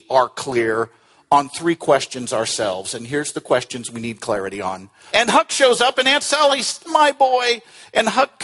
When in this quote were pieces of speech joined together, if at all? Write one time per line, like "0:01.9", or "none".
0:05.1
0:06.9